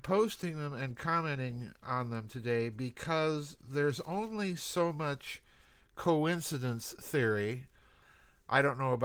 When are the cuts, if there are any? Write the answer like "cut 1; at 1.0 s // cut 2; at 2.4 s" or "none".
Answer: none